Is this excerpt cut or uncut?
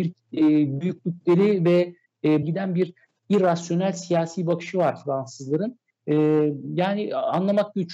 cut